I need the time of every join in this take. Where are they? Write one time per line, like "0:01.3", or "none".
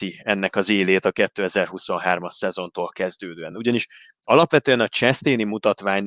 none